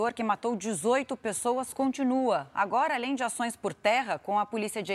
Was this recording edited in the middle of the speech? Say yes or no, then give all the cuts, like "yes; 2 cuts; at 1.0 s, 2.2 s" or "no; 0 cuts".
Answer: no; 0 cuts